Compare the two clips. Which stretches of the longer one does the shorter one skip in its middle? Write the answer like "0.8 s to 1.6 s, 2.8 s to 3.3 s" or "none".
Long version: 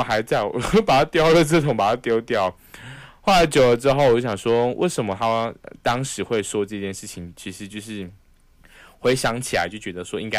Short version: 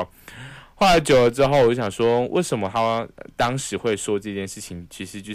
none